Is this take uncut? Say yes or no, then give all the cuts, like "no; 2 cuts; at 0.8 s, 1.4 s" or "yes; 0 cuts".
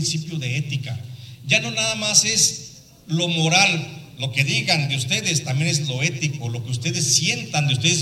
yes; 0 cuts